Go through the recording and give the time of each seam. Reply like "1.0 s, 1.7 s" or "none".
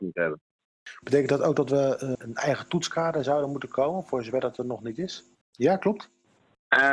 2.2 s, 5.4 s